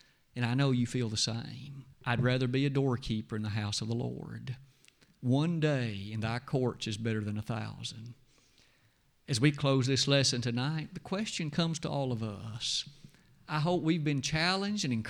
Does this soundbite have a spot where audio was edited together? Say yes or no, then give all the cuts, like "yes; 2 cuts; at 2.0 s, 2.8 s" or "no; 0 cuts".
yes; 1 cut; at 1.9 s